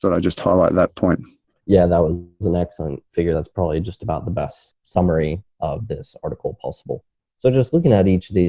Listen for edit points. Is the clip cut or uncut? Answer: uncut